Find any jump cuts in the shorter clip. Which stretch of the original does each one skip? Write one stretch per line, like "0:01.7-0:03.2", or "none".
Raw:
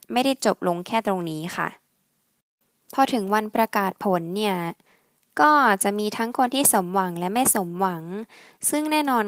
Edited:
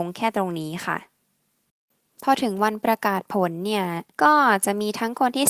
0:04.8-0:05.3